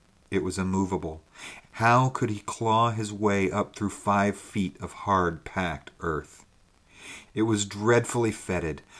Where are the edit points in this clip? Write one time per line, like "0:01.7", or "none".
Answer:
0:01.6
0:07.3